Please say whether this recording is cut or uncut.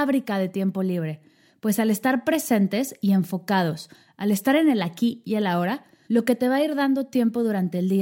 cut